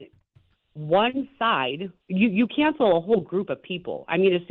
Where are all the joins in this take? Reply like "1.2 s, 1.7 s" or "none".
2.0 s